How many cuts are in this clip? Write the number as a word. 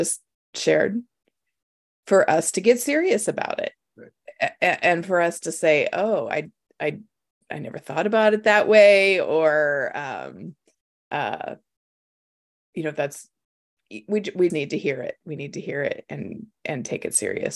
one